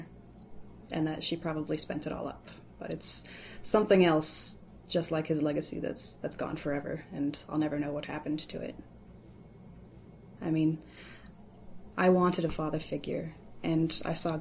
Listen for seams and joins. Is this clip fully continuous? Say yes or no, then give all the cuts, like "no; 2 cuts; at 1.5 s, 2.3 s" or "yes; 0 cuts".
no; 2 cuts; at 10.4 s, 11.9 s